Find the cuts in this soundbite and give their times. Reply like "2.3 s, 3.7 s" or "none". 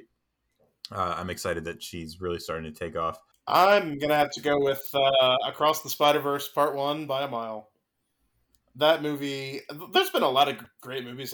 3.3 s